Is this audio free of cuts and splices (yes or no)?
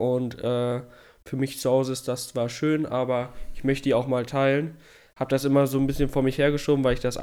yes